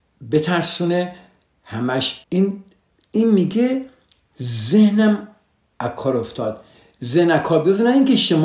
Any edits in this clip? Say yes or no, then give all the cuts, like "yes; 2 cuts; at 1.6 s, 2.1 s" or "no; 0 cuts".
yes; 1 cut; at 2.2 s